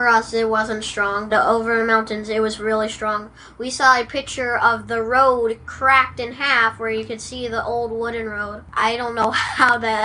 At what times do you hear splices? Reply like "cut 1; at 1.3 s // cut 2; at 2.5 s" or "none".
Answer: cut 1; at 1.3 s